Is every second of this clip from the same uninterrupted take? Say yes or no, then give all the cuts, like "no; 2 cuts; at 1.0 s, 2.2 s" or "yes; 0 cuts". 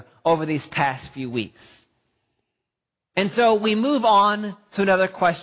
yes; 0 cuts